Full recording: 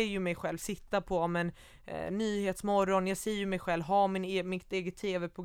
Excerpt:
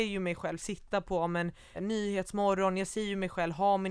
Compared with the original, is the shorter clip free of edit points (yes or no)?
no